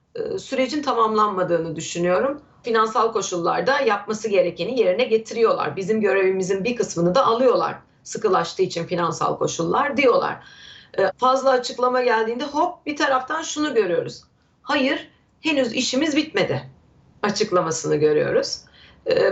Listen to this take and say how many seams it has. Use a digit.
2